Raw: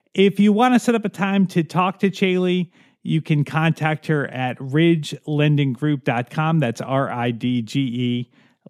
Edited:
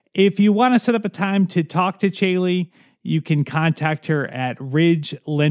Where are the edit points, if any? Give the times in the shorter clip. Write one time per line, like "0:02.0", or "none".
none